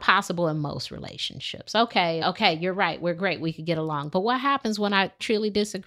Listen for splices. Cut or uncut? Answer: cut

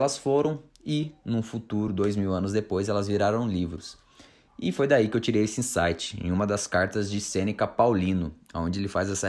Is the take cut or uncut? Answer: uncut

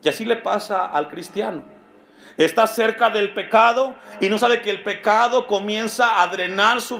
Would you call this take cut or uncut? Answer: uncut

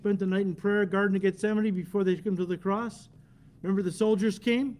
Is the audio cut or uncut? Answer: uncut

